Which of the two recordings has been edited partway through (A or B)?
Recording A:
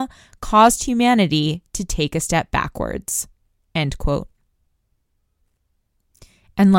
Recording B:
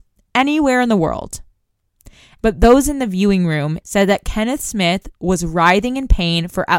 B